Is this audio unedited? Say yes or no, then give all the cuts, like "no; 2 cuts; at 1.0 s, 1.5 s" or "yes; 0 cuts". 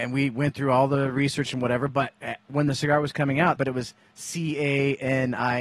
no; 1 cut; at 3.6 s